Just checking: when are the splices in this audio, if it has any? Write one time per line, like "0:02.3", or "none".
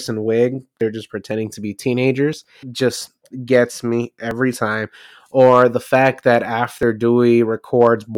0:02.6